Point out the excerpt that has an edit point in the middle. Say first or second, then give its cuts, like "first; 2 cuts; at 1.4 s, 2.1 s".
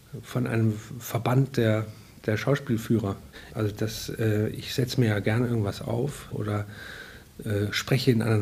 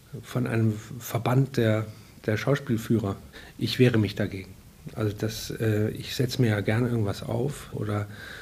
first; 1 cut; at 3.5 s